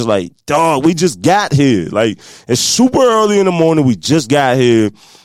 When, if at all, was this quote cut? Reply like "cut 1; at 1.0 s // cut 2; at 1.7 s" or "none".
none